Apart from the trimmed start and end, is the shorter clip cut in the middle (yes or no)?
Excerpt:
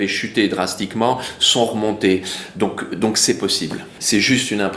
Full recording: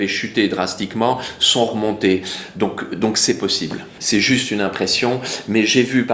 no